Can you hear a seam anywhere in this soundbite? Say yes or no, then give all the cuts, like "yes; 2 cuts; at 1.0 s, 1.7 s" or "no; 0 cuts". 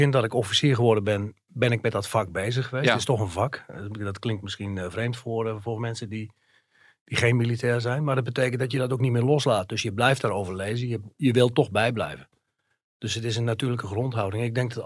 no; 0 cuts